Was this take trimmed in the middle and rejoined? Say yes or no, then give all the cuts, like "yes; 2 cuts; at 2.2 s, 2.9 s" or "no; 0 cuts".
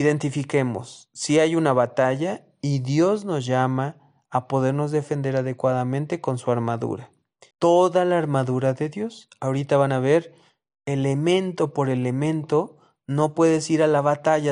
yes; 1 cut; at 7.5 s